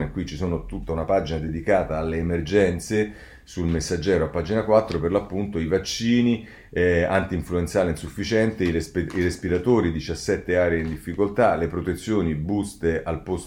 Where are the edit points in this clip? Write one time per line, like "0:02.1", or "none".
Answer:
none

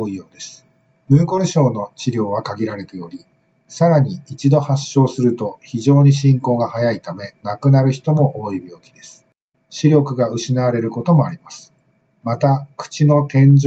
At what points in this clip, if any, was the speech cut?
0:01.0
0:09.5

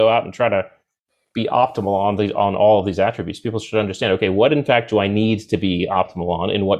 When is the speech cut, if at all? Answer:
none

